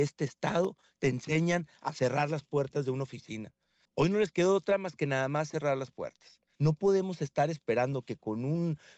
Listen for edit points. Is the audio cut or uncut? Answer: cut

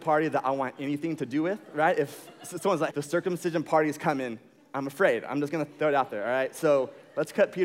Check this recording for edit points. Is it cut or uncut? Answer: cut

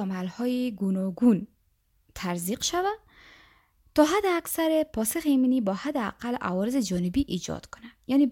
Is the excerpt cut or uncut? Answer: uncut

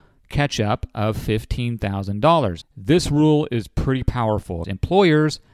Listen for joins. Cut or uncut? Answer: cut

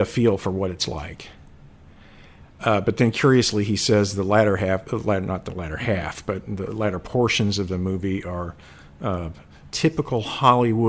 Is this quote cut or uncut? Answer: uncut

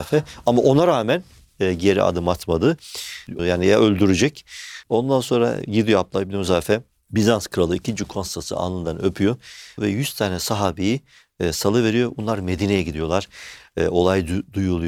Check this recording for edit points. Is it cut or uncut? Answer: cut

